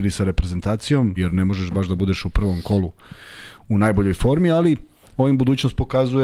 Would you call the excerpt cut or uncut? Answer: cut